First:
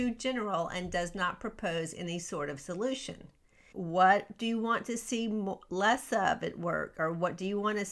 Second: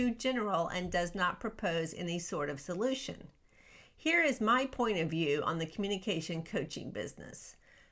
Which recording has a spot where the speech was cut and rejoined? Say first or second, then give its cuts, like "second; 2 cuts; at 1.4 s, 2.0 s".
first; 1 cut; at 3.7 s